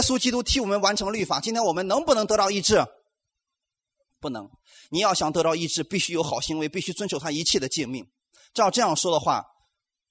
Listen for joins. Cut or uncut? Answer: uncut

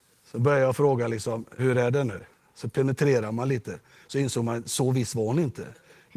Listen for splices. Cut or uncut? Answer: cut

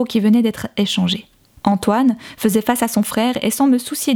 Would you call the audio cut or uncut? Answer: cut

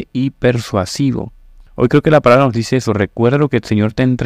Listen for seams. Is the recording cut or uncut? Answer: cut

